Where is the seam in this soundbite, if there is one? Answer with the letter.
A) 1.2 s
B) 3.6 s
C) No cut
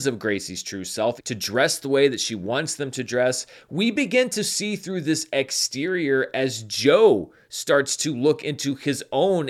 A